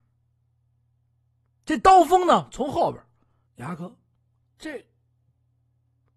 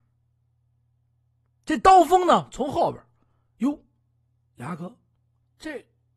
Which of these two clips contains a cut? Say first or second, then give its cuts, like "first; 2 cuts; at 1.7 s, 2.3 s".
first; 1 cut; at 3.5 s